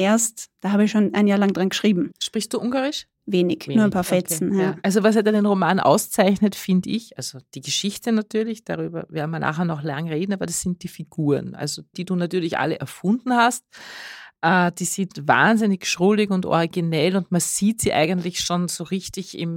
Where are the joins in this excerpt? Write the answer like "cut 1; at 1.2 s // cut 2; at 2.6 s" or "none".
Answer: cut 1; at 11.9 s